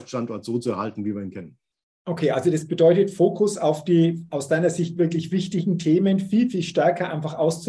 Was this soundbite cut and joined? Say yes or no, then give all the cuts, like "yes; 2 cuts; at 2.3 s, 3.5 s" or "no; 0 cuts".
no; 0 cuts